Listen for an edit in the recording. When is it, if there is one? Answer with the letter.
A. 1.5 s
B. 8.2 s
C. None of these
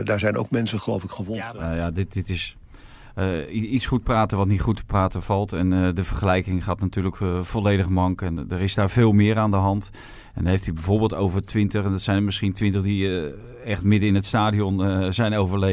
C